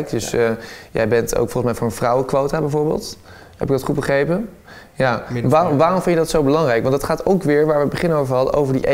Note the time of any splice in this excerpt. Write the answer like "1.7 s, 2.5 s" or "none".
none

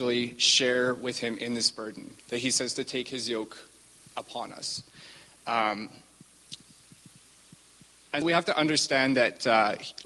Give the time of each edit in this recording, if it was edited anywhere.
2.2 s, 8.2 s

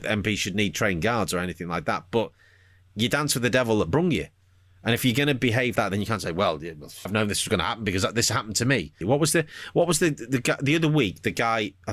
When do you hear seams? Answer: 5.8 s, 7.1 s, 9.0 s

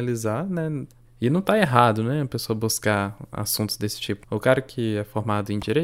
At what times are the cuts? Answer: 1.0 s, 4.2 s

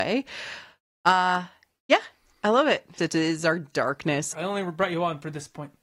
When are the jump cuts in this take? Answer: 3.0 s, 4.3 s

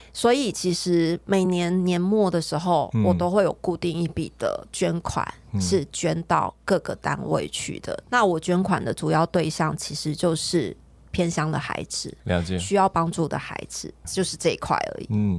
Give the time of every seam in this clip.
none

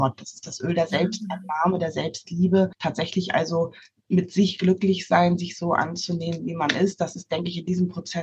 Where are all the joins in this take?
none

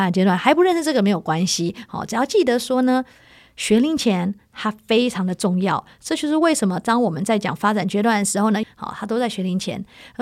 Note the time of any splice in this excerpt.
8.6 s

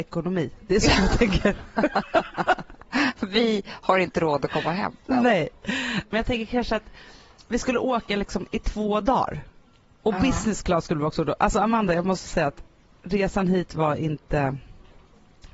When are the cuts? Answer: none

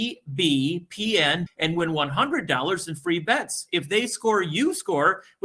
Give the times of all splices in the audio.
1.5 s

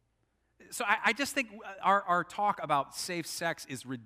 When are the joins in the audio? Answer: none

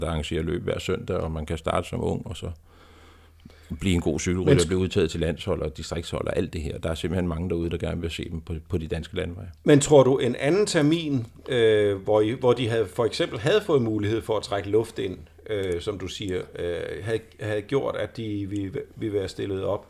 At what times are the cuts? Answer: none

